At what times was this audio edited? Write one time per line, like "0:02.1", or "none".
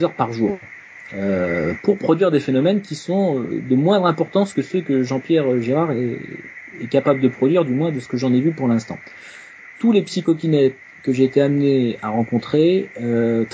0:09.7